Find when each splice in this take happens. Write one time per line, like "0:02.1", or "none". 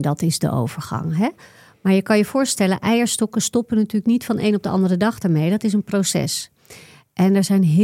none